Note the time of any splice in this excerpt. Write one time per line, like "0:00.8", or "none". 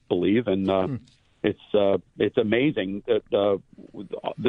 none